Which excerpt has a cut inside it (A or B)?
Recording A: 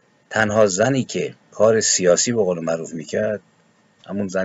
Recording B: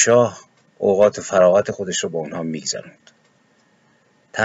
A